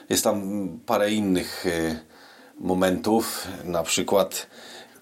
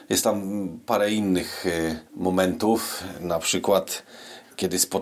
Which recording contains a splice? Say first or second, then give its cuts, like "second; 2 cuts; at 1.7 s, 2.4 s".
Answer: second; 1 cut; at 2.1 s